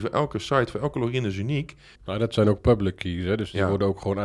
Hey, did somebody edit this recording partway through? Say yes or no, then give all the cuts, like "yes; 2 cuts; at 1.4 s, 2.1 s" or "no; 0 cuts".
yes; 1 cut; at 1.9 s